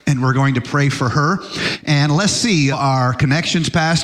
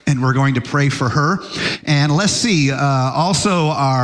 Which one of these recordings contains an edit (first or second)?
first